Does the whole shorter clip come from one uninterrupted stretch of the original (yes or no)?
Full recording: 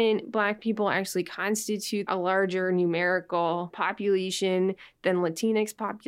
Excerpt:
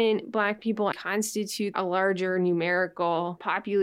no